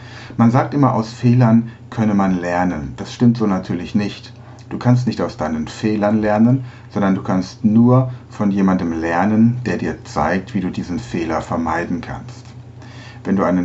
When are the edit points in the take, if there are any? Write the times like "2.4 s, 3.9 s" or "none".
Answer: none

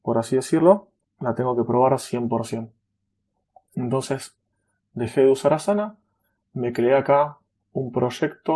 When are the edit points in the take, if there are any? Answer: none

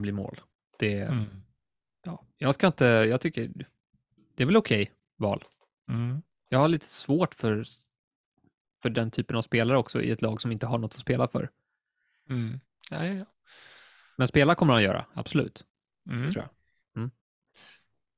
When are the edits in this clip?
none

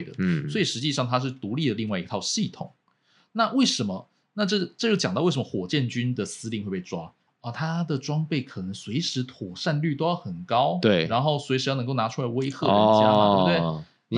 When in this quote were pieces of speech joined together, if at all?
7.3 s

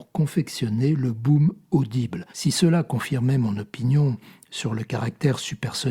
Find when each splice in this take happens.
2.3 s

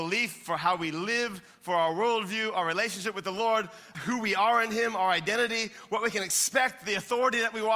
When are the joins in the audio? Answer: 3.9 s

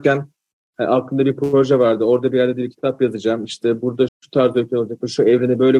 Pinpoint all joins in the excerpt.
4.1 s

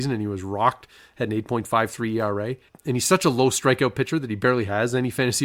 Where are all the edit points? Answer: none

